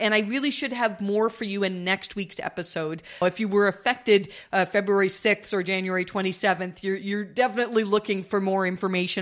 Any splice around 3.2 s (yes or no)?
yes